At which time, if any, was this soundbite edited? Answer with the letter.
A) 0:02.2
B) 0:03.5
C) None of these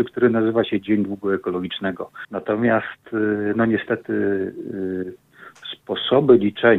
A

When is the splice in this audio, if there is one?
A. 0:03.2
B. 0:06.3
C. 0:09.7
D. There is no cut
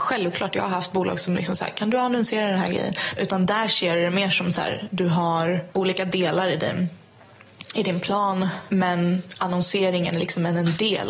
A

